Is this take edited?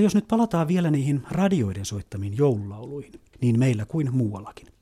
yes; 1 cut; at 3.3 s

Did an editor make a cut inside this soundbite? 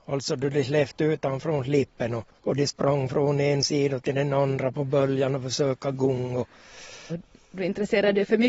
yes; 3 cuts; at 2.4 s, 4.7 s, 7.1 s

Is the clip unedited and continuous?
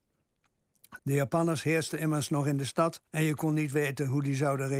no; 2 cuts; at 1.0 s, 3.1 s

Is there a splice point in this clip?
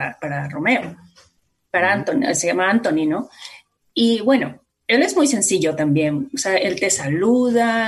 no; 0 cuts

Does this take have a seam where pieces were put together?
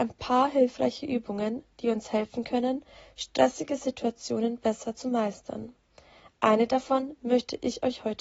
no; 0 cuts

